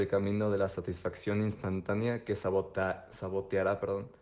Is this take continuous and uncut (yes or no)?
yes